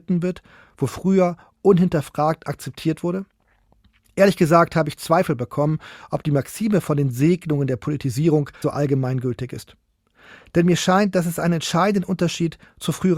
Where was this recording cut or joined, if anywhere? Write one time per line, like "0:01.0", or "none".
0:08.6

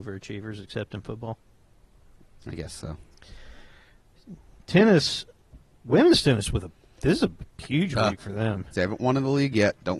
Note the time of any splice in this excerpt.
0:08.7

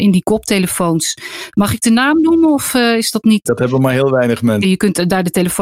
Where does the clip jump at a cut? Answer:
0:03.5
0:04.6

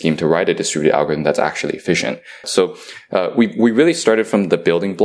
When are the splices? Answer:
0:02.4

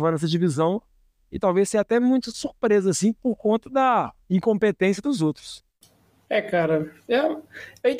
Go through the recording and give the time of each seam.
0:04.2

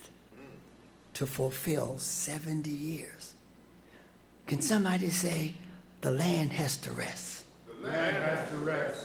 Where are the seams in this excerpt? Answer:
none

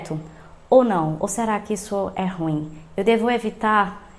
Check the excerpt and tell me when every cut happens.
none

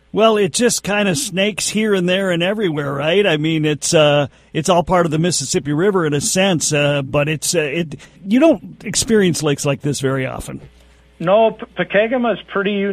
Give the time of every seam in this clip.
0:08.2

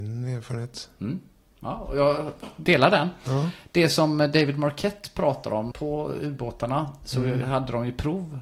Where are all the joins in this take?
0:05.7

